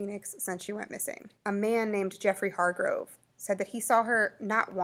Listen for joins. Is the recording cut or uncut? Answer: cut